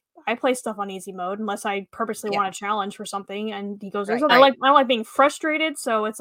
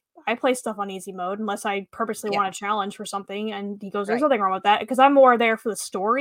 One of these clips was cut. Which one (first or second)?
first